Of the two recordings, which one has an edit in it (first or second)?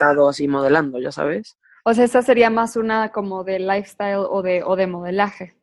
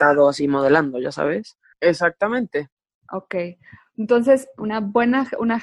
second